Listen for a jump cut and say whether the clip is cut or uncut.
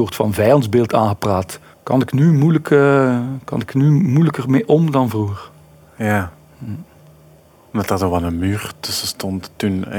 cut